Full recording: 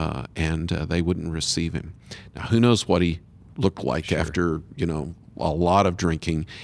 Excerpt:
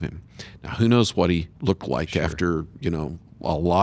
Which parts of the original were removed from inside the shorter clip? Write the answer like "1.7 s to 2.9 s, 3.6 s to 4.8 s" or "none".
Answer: 3.3 s to 3.5 s